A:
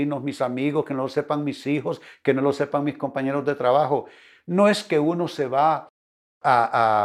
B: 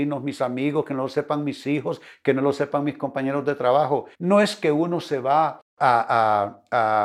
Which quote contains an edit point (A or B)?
B